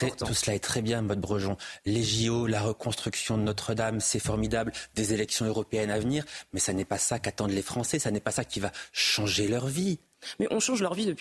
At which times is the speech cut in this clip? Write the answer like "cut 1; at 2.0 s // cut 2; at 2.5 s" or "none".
none

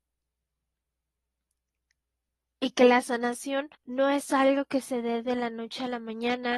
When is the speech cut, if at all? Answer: cut 1; at 3.7 s

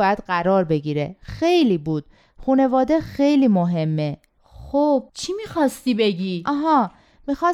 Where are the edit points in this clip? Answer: cut 1; at 5.1 s

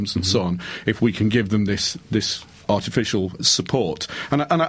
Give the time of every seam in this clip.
cut 1; at 3.4 s

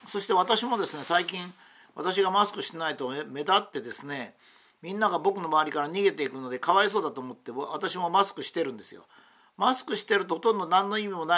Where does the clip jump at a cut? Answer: none

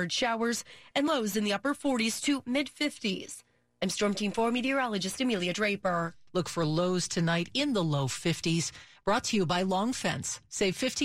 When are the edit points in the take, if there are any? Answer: cut 1; at 6.3 s

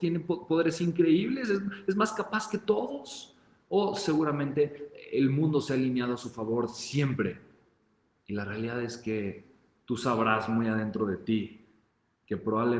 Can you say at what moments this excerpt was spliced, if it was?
none

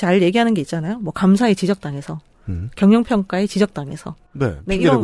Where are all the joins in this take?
none

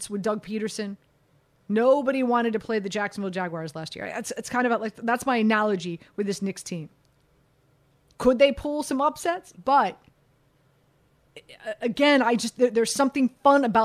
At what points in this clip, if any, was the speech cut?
cut 1; at 9.5 s

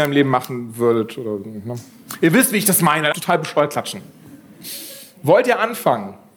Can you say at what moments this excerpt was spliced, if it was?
cut 1; at 3.1 s

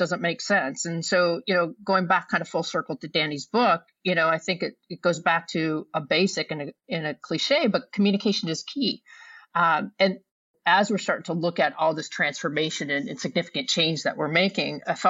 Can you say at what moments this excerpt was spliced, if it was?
none

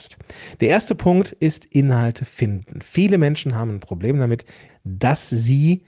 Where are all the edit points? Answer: cut 1; at 4.7 s

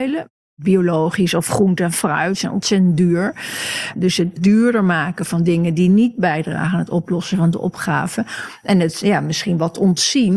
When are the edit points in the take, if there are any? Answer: cut 1; at 3.9 s

